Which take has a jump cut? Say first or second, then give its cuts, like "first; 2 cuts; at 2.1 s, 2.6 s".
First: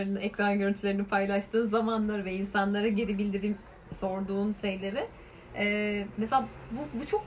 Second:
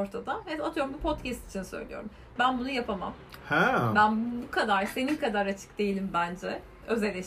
second; 1 cut; at 2.4 s